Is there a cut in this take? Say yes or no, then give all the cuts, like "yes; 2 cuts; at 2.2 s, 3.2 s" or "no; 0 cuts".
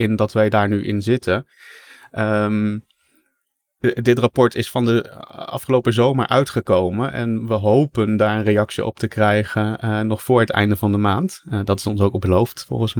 no; 0 cuts